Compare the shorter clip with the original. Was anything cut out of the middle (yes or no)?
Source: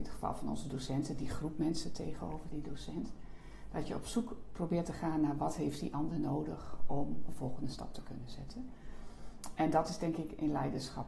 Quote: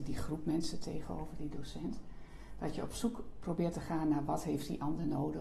no